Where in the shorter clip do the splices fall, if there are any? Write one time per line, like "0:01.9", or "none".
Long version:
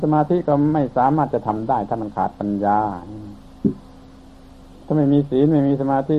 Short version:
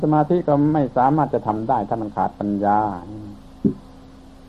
none